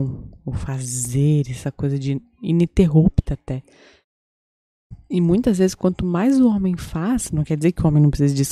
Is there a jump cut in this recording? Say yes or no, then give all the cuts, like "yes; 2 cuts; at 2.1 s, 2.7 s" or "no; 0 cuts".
no; 0 cuts